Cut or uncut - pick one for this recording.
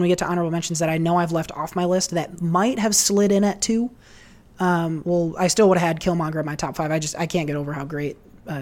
cut